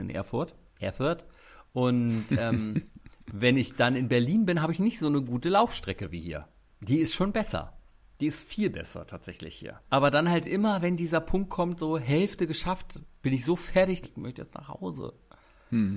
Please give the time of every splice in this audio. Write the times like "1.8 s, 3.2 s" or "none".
9.8 s, 14.0 s